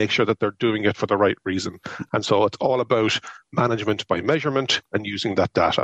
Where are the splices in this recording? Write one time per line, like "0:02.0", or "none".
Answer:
0:02.1